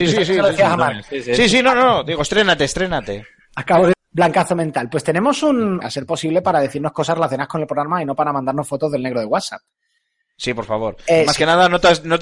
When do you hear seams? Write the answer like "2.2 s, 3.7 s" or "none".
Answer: 3.9 s, 5.8 s